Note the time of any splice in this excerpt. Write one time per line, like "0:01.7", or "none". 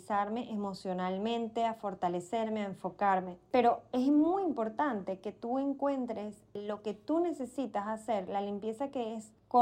none